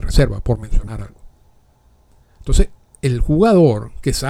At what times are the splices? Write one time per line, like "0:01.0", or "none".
none